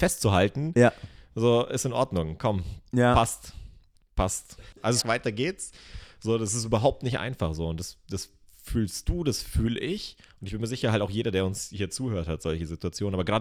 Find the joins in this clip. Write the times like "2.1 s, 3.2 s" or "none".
5.0 s

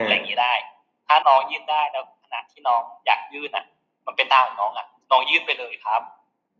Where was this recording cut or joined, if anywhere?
1.2 s

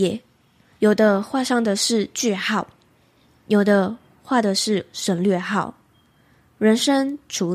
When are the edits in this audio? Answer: none

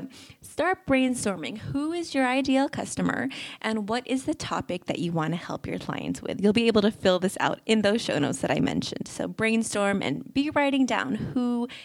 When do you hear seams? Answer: none

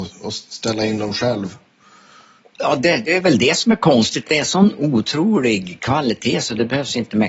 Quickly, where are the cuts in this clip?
none

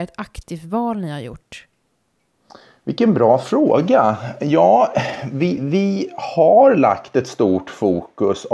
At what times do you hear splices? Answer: 5.6 s

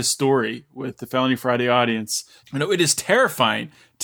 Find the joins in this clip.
2.4 s

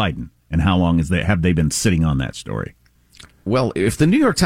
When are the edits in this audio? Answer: 3.5 s

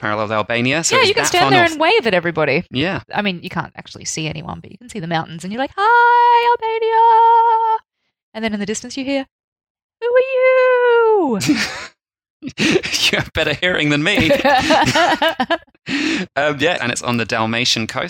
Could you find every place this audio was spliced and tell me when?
16.8 s

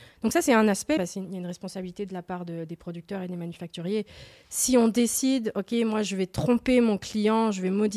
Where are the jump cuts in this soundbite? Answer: 1.0 s

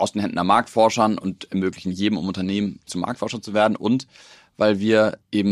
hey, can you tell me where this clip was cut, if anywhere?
2.9 s

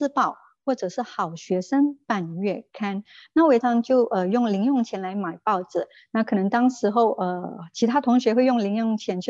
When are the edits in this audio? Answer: 3.6 s

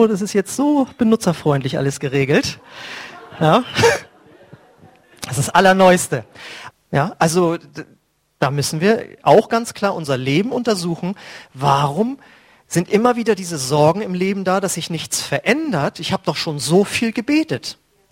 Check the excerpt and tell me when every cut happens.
6.7 s

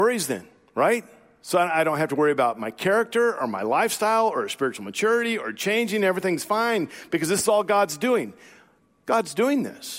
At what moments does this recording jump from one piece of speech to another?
none

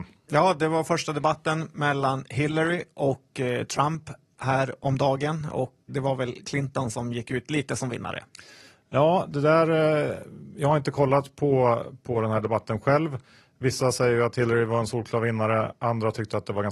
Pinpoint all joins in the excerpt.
5.9 s

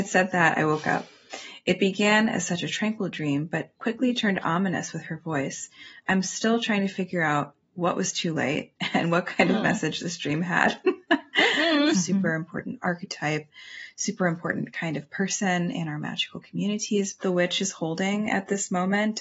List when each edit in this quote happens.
11.9 s, 17.2 s

